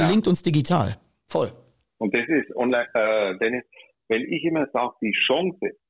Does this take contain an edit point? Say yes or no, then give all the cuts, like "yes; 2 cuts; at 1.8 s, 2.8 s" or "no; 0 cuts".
no; 0 cuts